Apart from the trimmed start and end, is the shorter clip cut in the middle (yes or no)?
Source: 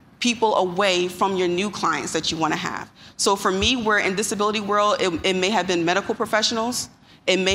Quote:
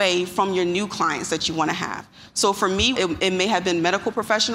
yes